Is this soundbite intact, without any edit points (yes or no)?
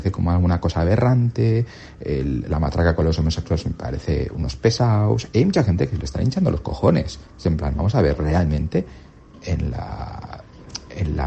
yes